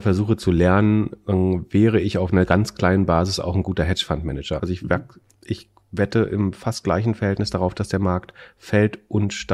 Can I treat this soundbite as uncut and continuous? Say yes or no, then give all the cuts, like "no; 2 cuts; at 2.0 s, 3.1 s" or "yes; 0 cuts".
no; 1 cut; at 4.6 s